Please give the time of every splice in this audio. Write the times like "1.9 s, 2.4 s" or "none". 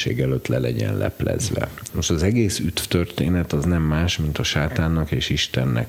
1.9 s